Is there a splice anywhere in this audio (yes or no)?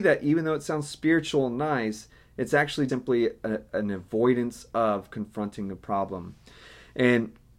yes